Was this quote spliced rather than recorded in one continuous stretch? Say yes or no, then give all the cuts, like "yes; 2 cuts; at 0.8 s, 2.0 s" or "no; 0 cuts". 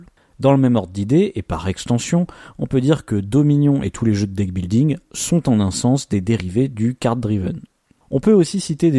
no; 0 cuts